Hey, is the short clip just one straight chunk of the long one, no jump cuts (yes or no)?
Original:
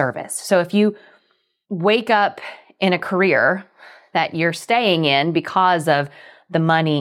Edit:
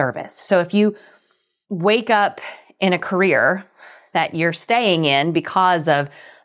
yes